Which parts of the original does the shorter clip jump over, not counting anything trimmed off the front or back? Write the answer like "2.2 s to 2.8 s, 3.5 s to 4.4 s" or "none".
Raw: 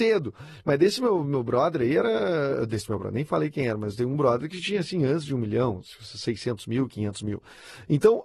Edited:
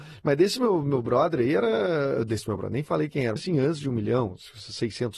3.8 s to 4.8 s